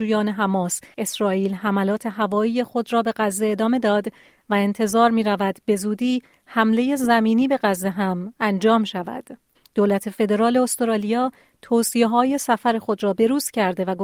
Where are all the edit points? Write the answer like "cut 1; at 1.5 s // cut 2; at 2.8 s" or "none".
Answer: cut 1; at 9.5 s